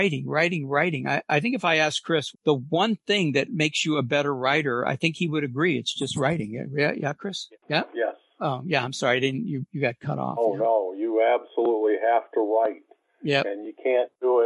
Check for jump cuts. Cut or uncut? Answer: cut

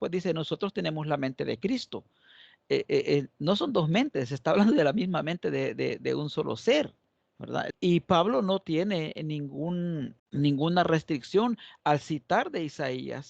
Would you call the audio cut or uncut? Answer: cut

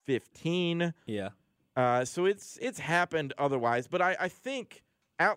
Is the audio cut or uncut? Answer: uncut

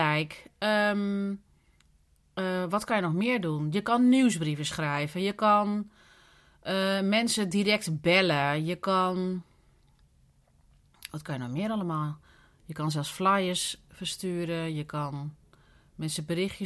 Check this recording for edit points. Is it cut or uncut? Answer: uncut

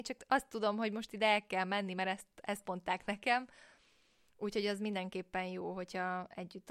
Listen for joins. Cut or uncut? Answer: uncut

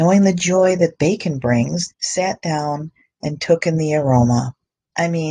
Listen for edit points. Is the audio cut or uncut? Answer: cut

